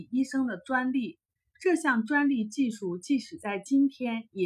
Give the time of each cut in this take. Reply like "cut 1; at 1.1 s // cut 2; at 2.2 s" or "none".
none